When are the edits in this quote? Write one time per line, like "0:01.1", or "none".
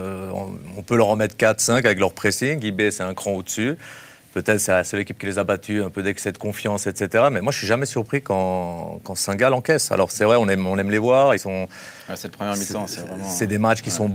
none

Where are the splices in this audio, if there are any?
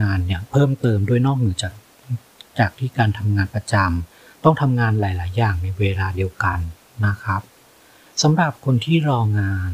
none

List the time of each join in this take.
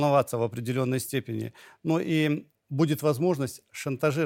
none

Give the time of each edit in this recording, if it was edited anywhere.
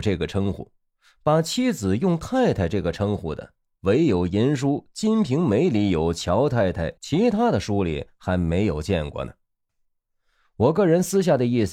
0:07.0
0:09.7

